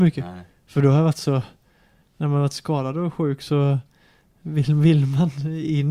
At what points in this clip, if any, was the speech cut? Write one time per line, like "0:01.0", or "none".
none